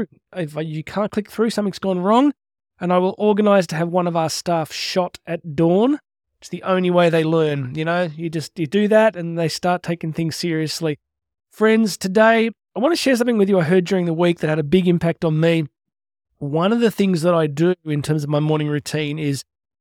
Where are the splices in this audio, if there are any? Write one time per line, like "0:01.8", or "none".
none